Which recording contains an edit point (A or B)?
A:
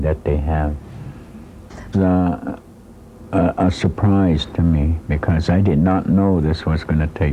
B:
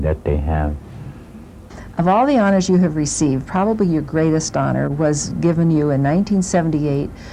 A